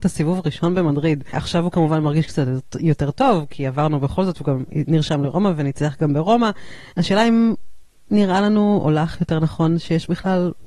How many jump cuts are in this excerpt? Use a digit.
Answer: 1